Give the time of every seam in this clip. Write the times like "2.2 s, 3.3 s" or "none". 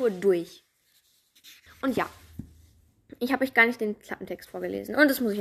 1.7 s